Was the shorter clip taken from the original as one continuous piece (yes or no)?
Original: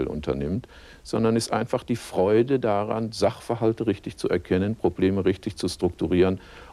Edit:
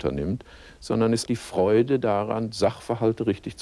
no